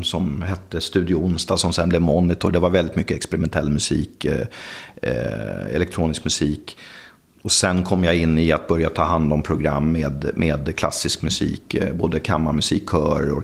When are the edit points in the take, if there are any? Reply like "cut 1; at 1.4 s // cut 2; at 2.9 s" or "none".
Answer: none